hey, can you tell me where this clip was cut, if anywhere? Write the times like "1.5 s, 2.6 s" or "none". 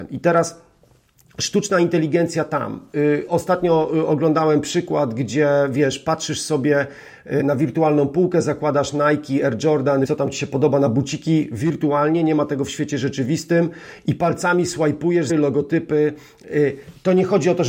7.4 s, 10.0 s, 15.3 s

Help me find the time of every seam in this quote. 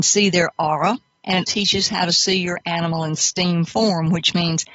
1.4 s

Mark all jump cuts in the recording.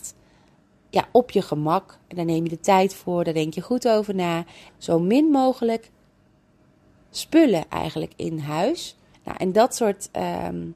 4.7 s, 9.1 s

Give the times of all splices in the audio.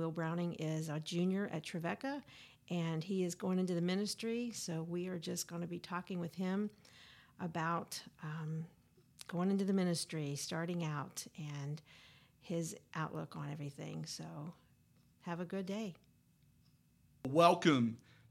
15.1 s

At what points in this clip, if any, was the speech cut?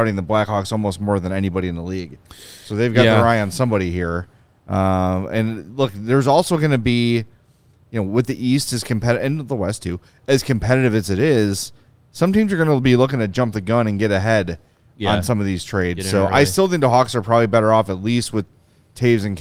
none

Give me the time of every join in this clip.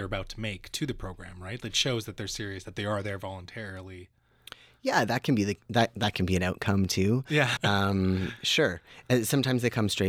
7.6 s

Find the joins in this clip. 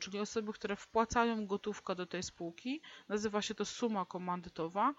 none

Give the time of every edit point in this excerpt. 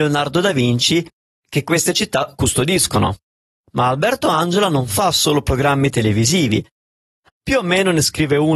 7.3 s

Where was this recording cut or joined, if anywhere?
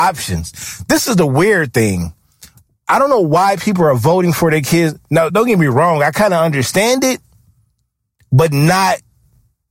none

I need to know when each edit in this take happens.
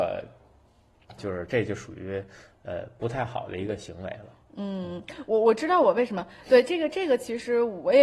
1.2 s

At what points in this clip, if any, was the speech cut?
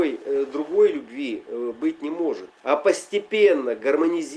2.5 s

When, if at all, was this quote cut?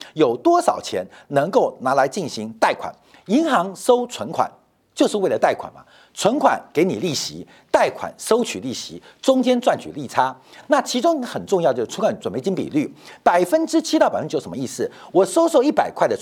none

